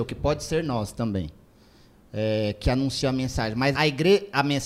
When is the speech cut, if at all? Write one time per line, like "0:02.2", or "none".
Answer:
0:03.7